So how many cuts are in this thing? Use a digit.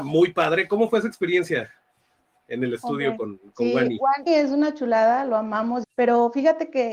2